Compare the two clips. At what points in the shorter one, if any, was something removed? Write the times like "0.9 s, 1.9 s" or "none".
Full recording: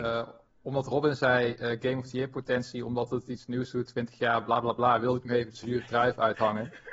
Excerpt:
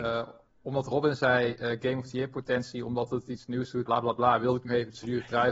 3.9 s